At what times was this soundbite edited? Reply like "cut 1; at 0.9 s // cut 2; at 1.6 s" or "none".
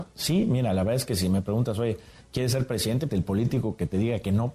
cut 1; at 3.1 s

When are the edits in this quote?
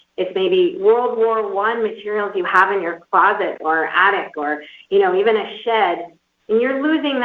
none

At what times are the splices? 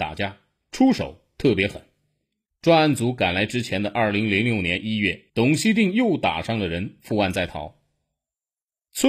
cut 1; at 2.5 s // cut 2; at 5.3 s

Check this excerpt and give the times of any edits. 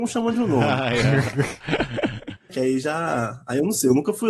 cut 1; at 2.5 s

